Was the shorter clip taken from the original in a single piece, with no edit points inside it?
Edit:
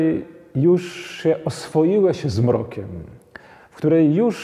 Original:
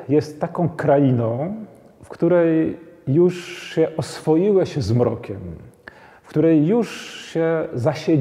yes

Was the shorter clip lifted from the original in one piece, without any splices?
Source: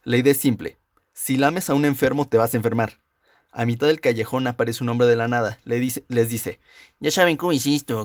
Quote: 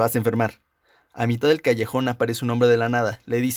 yes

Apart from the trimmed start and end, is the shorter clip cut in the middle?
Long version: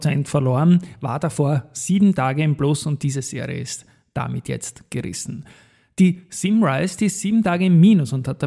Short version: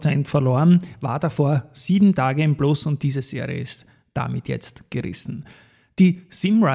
no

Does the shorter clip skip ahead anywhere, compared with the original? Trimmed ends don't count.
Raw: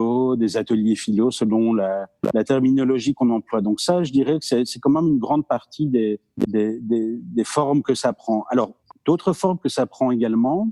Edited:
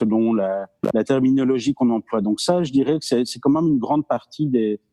no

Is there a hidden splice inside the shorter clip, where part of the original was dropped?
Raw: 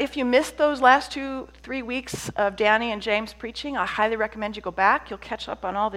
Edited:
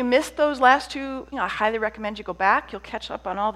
yes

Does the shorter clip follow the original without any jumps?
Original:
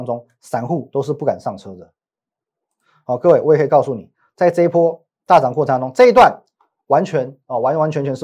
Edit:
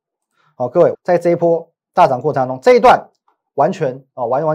no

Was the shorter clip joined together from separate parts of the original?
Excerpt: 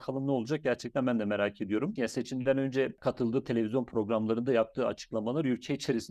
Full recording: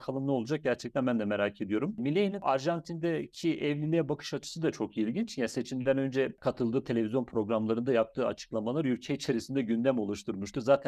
yes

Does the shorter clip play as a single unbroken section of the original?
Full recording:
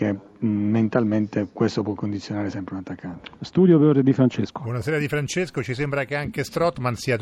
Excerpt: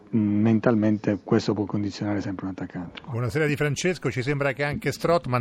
no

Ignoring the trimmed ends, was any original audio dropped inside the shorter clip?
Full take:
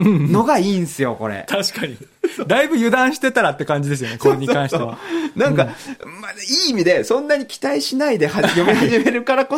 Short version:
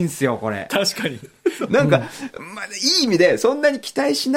yes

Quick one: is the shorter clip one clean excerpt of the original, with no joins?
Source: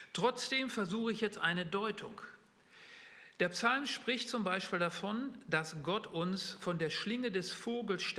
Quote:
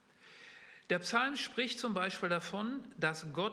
yes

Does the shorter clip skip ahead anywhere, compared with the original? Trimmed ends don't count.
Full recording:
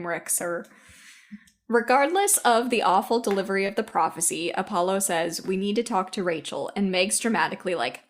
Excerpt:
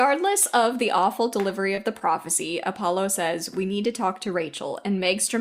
no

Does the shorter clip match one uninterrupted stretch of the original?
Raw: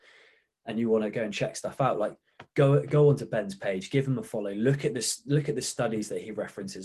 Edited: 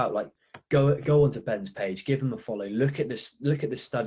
yes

